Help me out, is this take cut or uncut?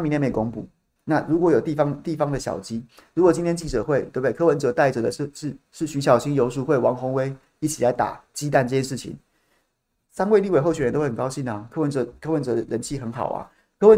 cut